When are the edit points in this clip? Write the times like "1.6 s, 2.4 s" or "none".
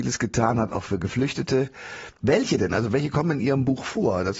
2.2 s